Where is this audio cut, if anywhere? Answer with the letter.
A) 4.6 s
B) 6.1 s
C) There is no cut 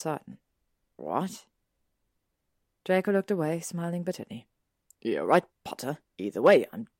B